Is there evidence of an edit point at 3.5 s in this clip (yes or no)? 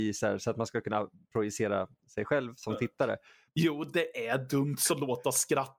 yes